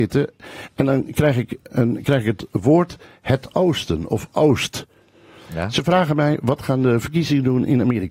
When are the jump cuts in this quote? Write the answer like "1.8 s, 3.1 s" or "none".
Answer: 1.7 s, 5.5 s

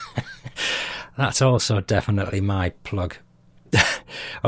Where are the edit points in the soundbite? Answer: none

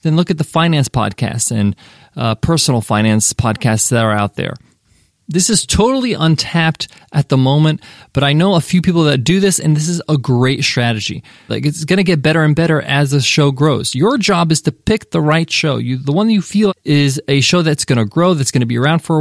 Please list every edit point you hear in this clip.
11.5 s, 16.7 s

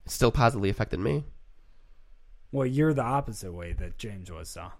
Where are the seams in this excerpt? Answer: 2.4 s

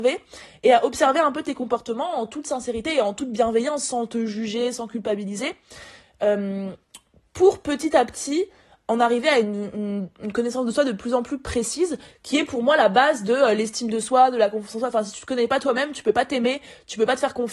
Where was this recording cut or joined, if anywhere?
none

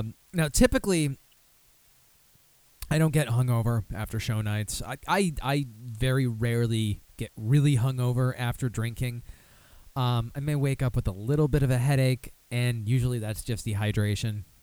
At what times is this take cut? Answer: none

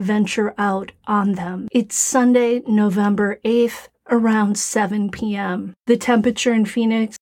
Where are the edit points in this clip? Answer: 1.7 s, 3.9 s

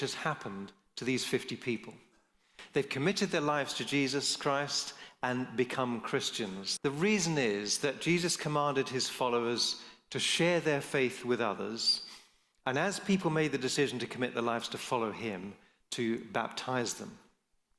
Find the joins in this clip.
6.8 s

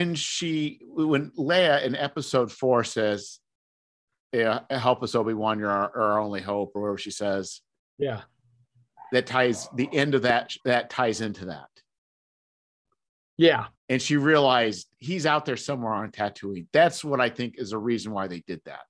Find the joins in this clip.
10.6 s, 13.7 s

